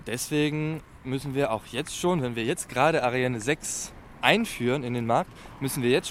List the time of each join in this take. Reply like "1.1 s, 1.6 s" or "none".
none